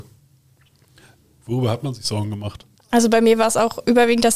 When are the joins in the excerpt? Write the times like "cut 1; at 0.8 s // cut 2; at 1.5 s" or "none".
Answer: cut 1; at 2.7 s